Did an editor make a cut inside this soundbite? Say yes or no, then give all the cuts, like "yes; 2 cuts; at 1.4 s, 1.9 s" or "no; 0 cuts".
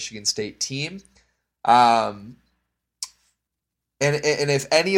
no; 0 cuts